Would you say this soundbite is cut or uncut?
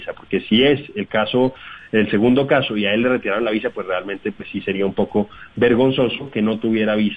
uncut